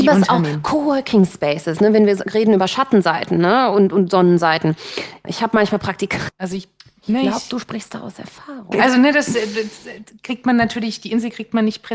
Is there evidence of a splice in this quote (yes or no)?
yes